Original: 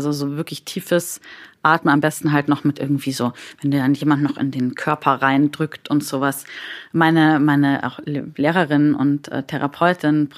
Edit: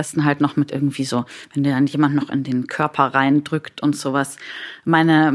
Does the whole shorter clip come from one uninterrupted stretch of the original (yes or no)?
yes